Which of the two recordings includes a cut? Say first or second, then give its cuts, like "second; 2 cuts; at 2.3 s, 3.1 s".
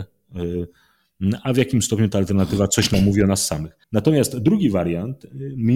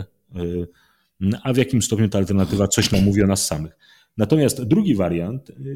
first; 1 cut; at 3.8 s